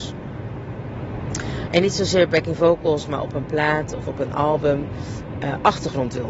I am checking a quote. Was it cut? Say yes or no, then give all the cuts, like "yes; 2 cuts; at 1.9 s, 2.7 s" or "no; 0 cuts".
yes; 1 cut; at 1.7 s